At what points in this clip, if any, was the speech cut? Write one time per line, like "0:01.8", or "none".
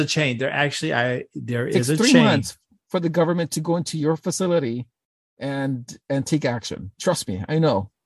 none